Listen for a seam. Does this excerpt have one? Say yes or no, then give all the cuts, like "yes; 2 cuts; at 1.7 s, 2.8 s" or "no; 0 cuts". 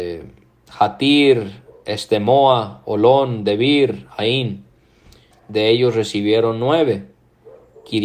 yes; 1 cut; at 5.3 s